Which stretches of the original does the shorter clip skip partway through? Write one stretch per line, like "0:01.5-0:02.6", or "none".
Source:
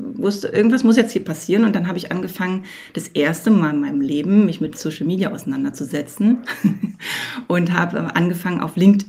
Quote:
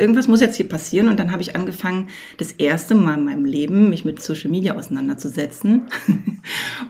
none